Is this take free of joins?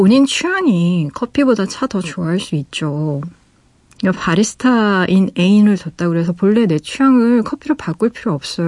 yes; 0 cuts

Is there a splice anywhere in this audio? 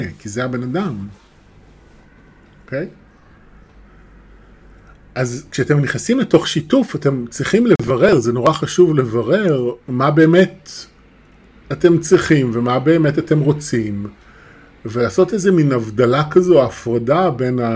yes; 1 cut; at 9.8 s

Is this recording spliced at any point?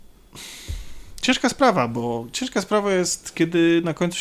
no; 0 cuts

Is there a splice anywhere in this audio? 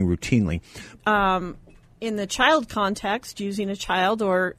yes; 1 cut; at 1.0 s

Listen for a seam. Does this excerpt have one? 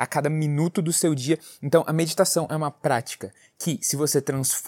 no; 0 cuts

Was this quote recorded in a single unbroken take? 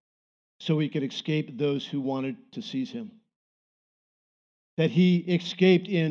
yes; 0 cuts

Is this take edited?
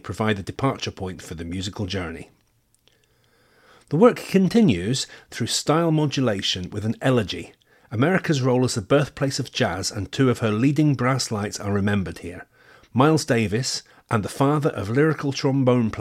yes; 1 cut; at 13.9 s

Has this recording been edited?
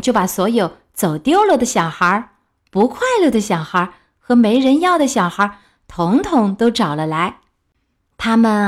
no; 0 cuts

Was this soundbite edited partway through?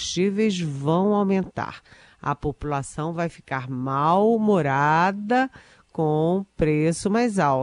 no; 0 cuts

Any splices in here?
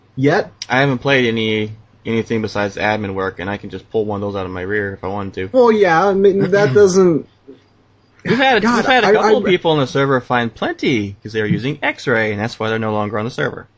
no; 0 cuts

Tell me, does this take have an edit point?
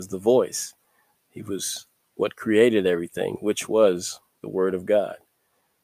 no; 0 cuts

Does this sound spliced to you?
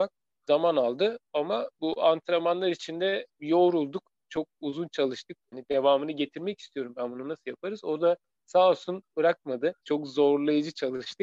yes; 2 cuts; at 5.5 s, 9.8 s

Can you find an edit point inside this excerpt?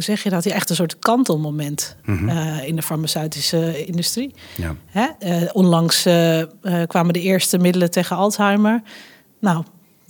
no; 0 cuts

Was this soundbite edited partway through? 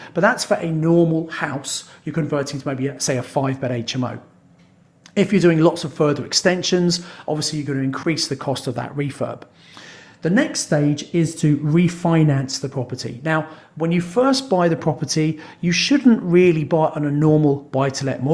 no; 0 cuts

